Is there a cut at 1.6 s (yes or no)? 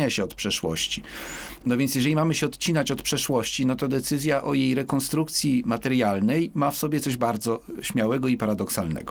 yes